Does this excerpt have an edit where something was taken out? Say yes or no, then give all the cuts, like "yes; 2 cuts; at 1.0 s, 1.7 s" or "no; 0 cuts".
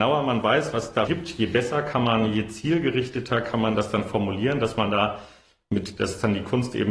yes; 1 cut; at 1.1 s